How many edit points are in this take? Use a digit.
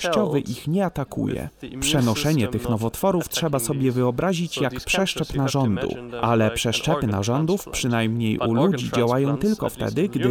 0